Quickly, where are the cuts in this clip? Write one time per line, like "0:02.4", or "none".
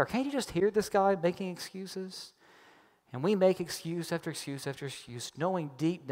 none